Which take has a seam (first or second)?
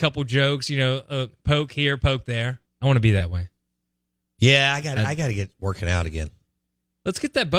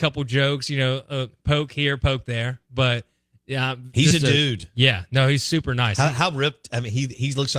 first